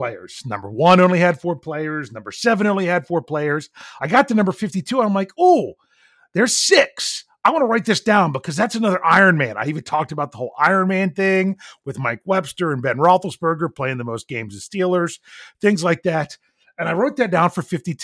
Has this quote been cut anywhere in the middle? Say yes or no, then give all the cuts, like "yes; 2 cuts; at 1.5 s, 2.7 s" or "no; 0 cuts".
no; 0 cuts